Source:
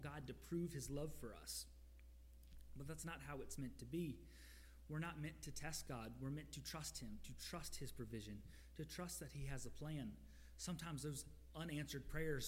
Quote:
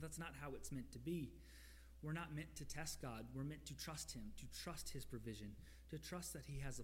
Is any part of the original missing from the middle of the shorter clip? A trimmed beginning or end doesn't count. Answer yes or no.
no